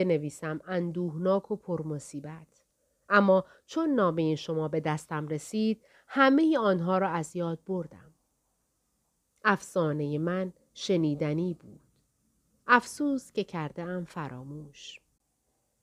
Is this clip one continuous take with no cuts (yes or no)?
yes